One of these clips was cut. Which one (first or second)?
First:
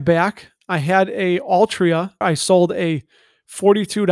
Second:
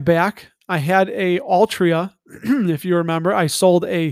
first